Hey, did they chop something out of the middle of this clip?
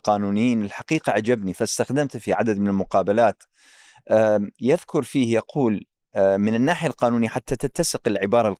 no; 0 cuts

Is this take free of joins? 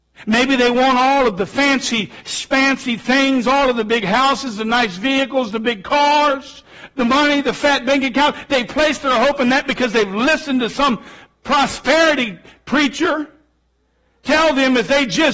yes; 0 cuts

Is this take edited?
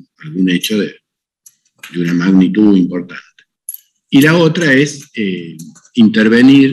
no; 0 cuts

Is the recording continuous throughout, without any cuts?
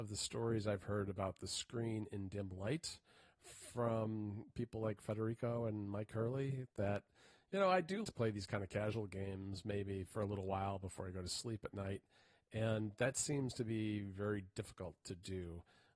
no; 1 cut; at 8.0 s

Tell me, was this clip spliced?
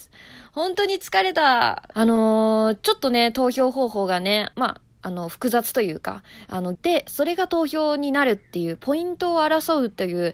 yes; 3 cuts; at 1.9 s, 4.5 s, 6.8 s

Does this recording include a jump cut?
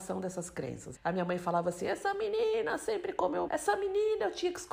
yes; 2 cuts; at 1.0 s, 3.5 s

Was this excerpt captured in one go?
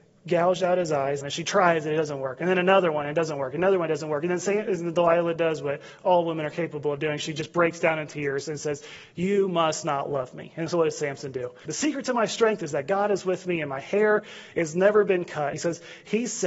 no; 3 cuts; at 1.2 s, 11.7 s, 15.5 s

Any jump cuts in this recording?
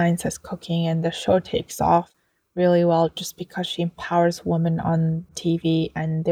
no; 0 cuts

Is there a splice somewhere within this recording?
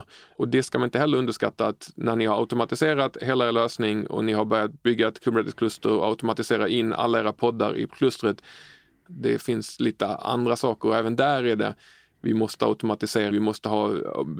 yes; 2 cuts; at 9.1 s, 13.3 s

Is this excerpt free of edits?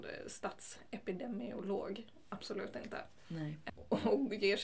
yes; 0 cuts

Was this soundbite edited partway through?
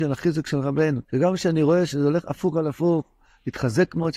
yes; 1 cut; at 1.0 s

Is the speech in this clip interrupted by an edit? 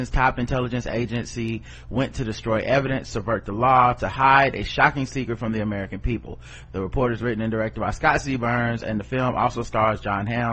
no; 0 cuts

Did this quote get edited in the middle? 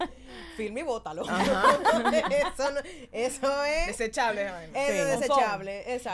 no; 0 cuts

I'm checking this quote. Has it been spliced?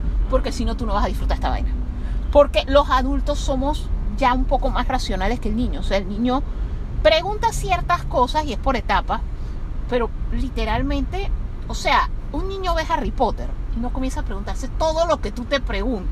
no; 0 cuts

